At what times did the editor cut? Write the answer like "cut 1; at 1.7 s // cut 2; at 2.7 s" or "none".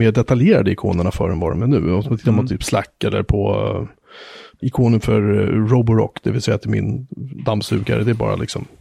cut 1; at 4.6 s